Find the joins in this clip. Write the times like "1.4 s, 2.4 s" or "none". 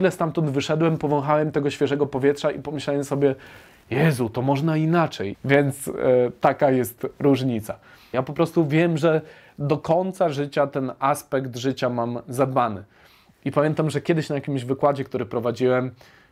5.3 s, 8.1 s